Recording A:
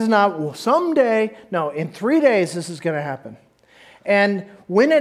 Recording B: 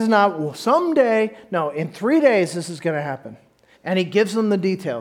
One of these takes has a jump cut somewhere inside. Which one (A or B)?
B